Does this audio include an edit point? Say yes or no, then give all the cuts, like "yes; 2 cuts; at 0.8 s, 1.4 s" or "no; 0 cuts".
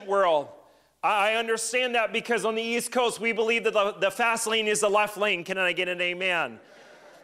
no; 0 cuts